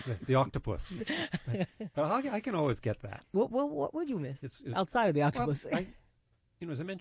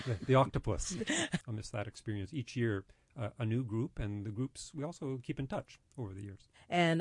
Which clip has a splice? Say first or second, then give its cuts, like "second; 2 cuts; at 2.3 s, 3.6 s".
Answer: second; 1 cut; at 1.4 s